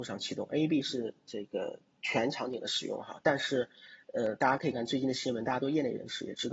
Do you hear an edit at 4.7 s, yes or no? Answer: yes